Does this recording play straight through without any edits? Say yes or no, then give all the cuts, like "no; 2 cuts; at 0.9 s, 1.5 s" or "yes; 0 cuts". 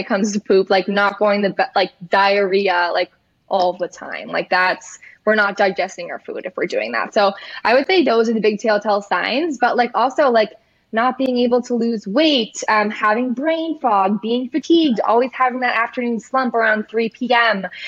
yes; 0 cuts